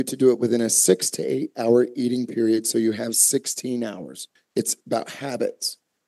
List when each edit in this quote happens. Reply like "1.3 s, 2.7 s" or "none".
4.4 s